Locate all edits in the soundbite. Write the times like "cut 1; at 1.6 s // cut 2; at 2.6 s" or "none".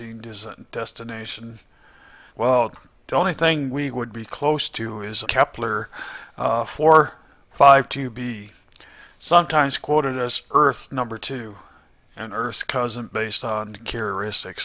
cut 1; at 2.3 s // cut 2; at 5.2 s